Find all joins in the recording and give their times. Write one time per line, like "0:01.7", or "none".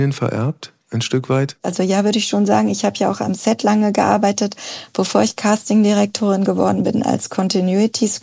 none

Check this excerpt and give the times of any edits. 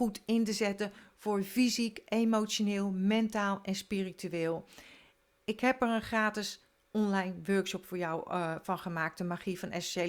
none

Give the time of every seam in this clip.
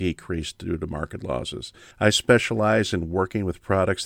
0:01.9

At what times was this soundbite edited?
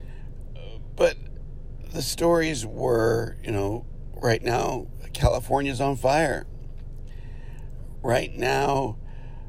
0:08.0

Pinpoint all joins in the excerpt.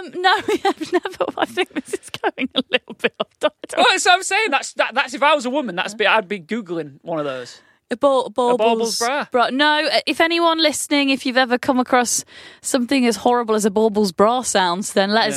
none

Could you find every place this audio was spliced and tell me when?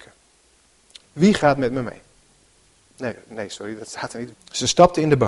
0:01.0
0:04.3

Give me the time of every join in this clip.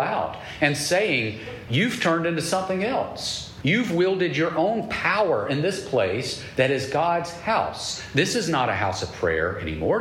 0:01.7
0:03.6

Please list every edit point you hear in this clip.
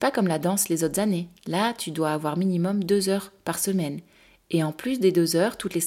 none

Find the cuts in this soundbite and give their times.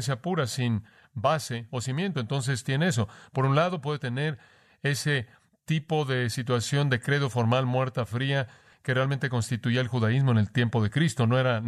none

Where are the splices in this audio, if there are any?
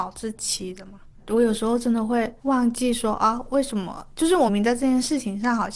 0:02.4
0:04.5

